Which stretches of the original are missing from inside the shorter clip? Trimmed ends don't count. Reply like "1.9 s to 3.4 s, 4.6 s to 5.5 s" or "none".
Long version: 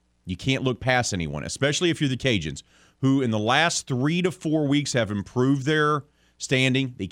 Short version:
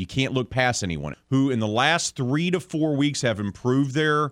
1.4 s to 2.8 s